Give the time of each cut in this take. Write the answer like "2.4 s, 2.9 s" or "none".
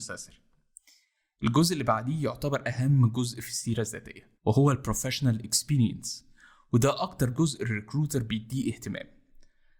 4.3 s